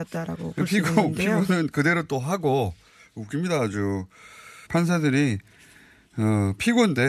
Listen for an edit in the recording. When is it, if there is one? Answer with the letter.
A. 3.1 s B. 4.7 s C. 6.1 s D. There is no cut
B